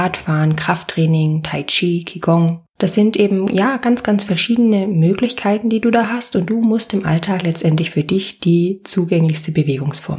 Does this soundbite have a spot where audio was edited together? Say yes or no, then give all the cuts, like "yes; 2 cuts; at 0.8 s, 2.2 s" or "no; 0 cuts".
no; 0 cuts